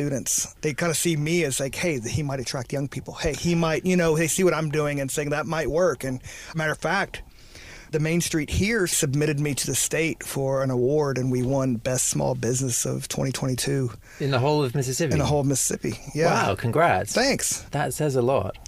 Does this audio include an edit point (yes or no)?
no